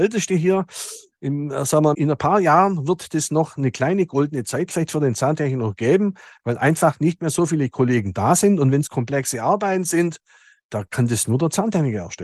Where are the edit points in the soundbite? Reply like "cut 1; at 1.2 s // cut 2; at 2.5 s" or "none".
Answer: cut 1; at 1.9 s

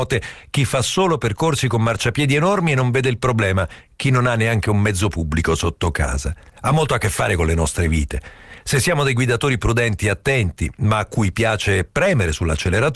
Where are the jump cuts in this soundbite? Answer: cut 1; at 6.5 s

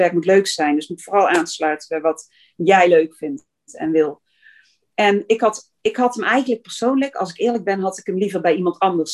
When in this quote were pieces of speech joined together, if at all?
none

